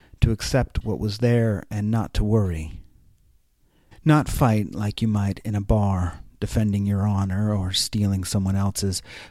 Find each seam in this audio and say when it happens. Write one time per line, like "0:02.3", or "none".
0:03.9